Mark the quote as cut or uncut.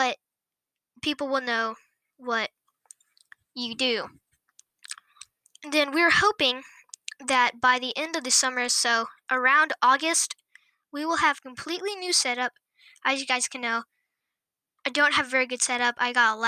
uncut